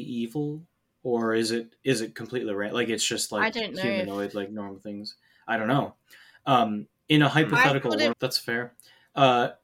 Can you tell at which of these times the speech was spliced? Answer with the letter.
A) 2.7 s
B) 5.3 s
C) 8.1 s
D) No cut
C